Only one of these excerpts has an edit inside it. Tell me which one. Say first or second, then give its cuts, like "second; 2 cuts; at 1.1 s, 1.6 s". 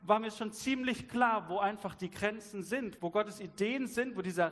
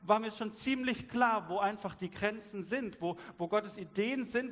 first; 1 cut; at 3.0 s